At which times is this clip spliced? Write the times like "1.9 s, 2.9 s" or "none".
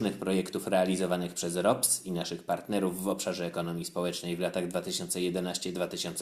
none